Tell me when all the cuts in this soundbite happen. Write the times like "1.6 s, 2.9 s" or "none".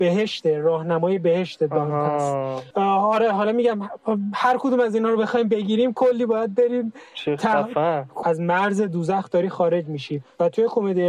2.7 s, 8.2 s